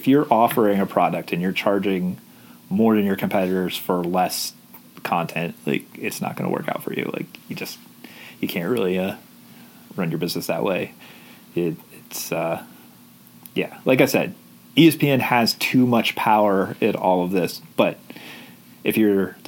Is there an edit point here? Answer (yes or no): no